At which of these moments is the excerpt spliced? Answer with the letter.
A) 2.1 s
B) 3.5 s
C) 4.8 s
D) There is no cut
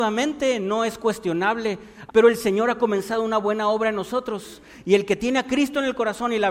A